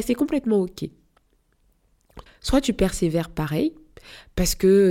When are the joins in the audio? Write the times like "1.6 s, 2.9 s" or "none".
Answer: 2.3 s